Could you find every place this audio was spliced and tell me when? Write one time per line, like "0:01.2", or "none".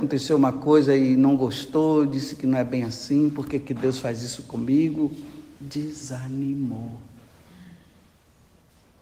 none